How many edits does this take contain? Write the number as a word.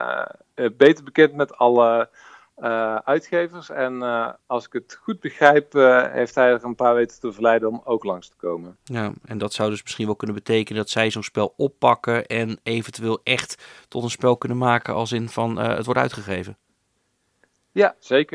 zero